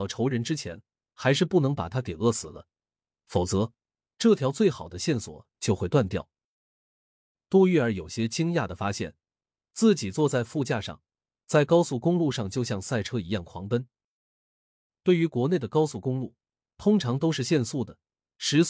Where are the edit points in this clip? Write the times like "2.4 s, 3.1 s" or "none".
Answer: 11.4 s, 14.9 s